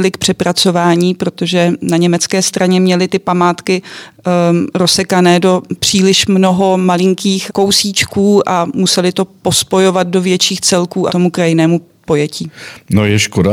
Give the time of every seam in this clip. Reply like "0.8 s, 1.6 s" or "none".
7.5 s, 11.1 s